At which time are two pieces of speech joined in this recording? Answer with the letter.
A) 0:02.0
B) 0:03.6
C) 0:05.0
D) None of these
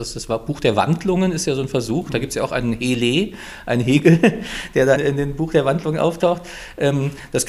C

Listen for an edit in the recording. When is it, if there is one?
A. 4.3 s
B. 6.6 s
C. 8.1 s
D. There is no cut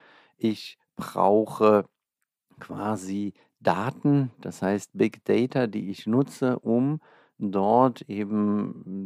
D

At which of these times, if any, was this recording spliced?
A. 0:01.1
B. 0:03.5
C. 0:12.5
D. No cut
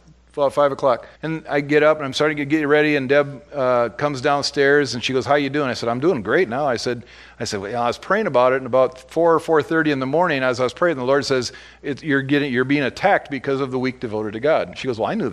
A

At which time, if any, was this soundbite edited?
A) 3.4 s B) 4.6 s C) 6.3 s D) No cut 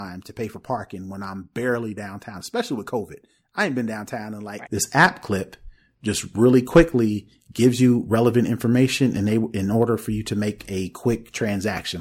B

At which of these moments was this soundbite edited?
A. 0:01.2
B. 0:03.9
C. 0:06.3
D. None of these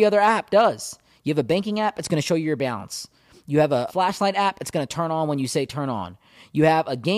B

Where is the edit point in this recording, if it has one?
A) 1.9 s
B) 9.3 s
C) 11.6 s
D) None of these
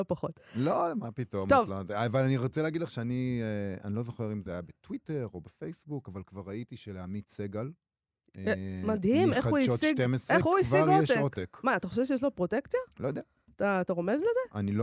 D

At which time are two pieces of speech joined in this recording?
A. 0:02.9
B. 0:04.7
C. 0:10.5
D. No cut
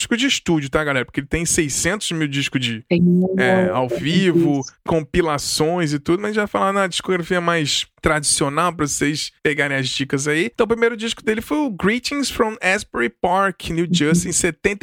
B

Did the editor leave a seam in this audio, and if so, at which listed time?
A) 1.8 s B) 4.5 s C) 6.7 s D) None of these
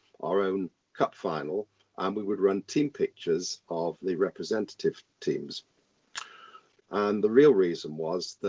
C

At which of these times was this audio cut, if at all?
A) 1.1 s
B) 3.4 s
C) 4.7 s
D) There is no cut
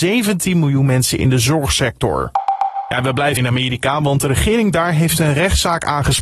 B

